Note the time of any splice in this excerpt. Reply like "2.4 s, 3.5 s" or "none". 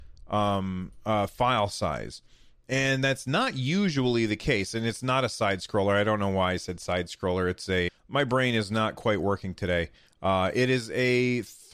7.9 s

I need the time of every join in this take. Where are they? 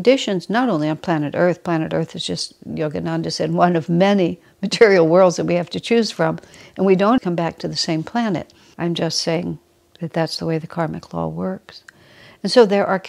7.2 s, 8.7 s

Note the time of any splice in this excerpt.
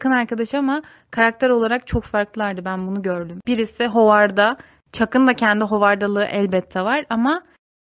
3.4 s

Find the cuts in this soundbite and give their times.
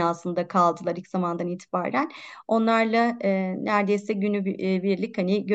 none

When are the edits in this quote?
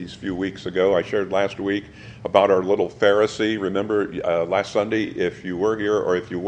none

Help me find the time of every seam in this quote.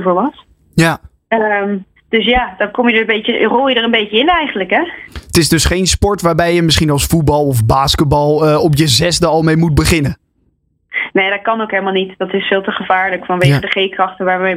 none

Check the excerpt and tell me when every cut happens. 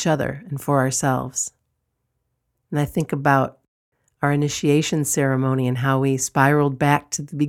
none

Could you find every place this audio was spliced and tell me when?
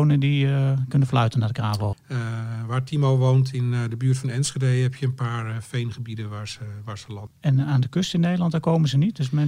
1.9 s, 7.3 s

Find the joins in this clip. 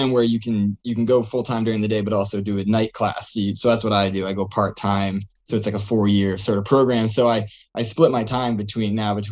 none

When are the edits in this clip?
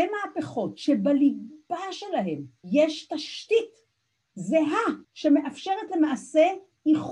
2.6 s, 5.0 s

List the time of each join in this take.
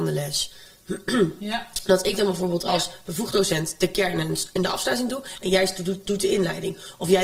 none

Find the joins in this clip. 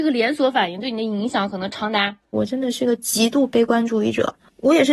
2.3 s

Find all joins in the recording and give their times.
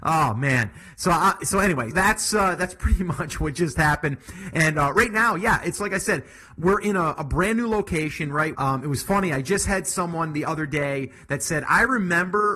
1.9 s, 8.6 s

